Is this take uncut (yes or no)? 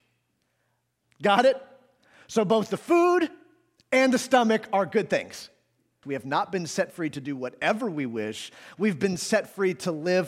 no